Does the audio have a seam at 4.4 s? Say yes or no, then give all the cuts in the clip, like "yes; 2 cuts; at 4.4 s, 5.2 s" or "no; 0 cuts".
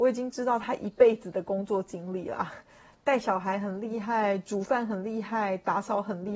no; 0 cuts